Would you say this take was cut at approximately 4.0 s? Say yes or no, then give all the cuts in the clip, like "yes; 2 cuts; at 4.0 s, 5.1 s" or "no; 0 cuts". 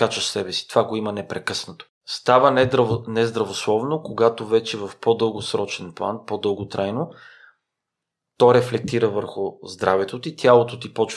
no; 1 cut; at 1.9 s